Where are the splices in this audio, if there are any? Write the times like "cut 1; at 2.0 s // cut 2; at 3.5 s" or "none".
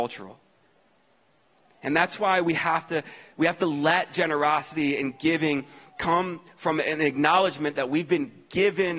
none